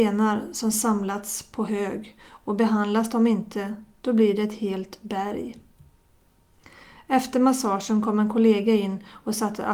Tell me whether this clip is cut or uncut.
uncut